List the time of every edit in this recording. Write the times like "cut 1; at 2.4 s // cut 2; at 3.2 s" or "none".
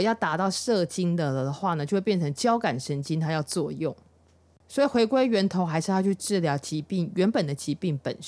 cut 1; at 4.6 s